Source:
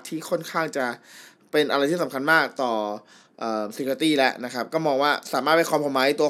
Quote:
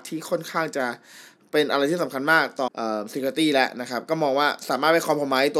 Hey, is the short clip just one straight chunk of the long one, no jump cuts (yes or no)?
no